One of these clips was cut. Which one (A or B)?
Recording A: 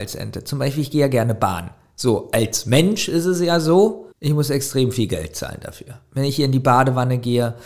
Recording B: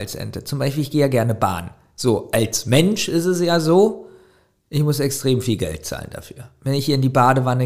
A